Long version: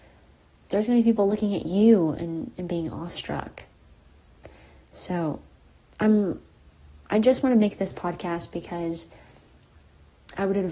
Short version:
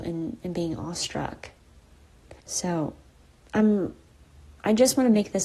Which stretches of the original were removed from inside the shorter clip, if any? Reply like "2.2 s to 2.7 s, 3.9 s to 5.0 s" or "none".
4.5 s to 4.9 s